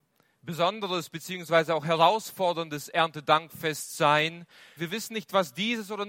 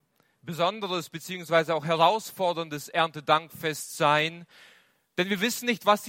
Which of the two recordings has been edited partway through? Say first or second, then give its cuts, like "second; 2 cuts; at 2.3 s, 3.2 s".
first; 1 cut; at 4.8 s